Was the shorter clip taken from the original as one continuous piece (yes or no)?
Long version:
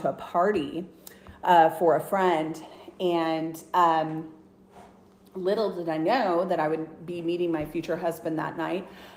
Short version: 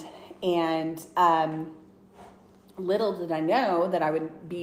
yes